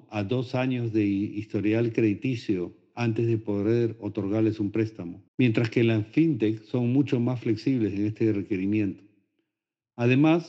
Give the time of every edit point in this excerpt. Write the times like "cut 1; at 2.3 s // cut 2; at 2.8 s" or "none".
cut 1; at 5.3 s